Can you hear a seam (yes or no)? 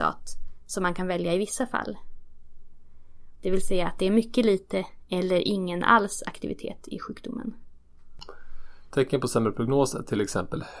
yes